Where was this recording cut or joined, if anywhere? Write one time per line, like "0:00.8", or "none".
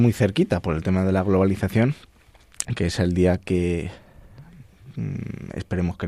0:02.7